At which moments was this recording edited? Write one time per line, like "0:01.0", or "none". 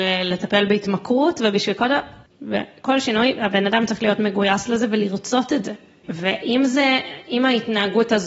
0:02.3
0:06.0